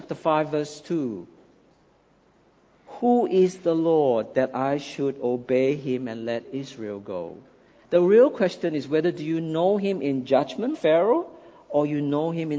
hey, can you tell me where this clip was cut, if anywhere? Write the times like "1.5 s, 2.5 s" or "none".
7.8 s, 10.7 s